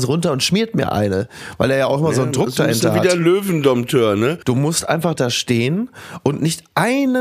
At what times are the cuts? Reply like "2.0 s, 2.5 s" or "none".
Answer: 4.4 s